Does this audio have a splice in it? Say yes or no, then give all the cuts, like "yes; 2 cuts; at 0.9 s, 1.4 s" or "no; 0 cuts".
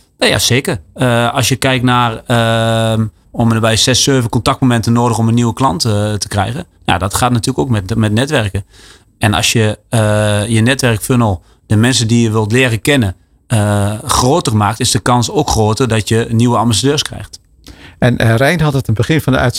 yes; 1 cut; at 3.2 s